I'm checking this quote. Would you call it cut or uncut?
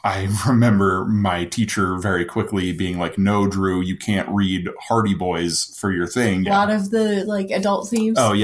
cut